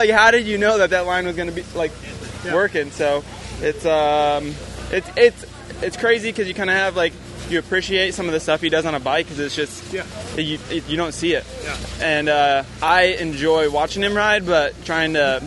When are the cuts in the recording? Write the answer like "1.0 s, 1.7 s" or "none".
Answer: 12.8 s